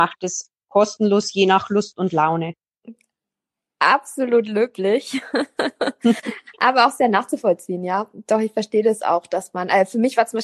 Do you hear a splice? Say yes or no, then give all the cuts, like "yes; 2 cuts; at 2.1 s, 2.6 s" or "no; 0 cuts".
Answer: no; 0 cuts